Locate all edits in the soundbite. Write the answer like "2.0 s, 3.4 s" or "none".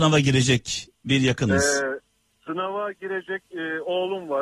none